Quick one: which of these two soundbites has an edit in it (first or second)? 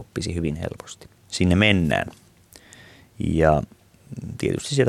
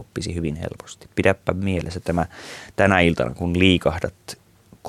first